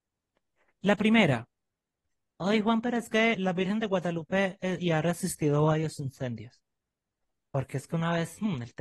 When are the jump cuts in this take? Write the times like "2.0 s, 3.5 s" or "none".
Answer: 3.3 s, 4.8 s